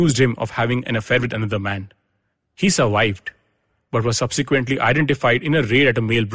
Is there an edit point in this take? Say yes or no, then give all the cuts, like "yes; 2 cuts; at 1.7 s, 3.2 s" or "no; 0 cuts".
no; 0 cuts